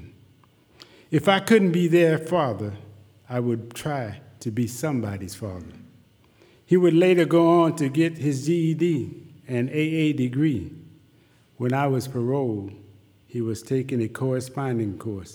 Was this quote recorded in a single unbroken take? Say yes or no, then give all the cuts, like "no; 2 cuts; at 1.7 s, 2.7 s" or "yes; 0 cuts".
no; 1 cut; at 6.6 s